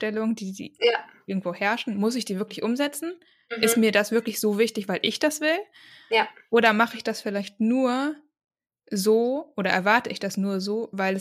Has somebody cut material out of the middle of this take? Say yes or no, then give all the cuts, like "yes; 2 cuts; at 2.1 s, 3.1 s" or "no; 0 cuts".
no; 0 cuts